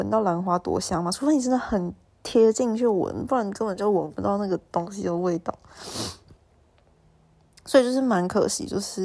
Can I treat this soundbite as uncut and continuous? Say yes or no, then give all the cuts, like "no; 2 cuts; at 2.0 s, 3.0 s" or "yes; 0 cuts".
yes; 0 cuts